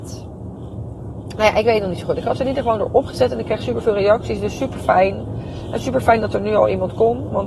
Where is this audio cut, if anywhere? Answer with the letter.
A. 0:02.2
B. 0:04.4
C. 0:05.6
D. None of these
D